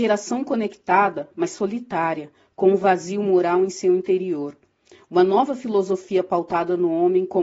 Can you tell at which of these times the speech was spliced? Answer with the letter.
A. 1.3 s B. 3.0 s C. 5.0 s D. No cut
D